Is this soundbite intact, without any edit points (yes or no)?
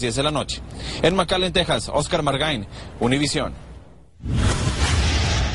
yes